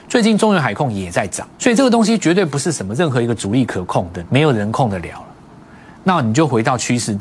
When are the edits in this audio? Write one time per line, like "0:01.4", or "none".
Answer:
0:01.5
0:04.2